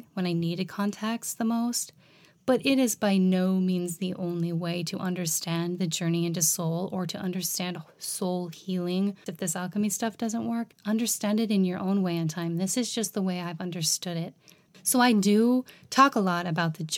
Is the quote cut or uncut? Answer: cut